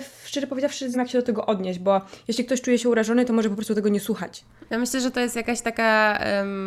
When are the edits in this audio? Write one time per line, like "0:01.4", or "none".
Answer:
0:00.9
0:04.7